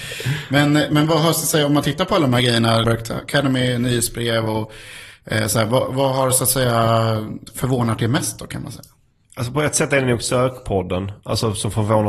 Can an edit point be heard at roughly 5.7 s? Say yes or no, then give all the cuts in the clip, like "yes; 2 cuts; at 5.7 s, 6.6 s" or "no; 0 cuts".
no; 1 cut; at 2.8 s